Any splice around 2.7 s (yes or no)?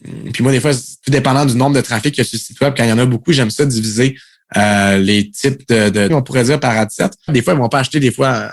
no